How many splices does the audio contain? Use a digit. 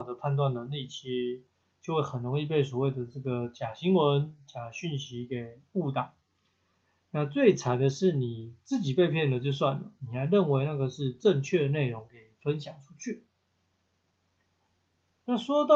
0